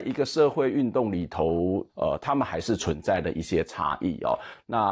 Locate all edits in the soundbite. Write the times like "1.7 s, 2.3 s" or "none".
1.9 s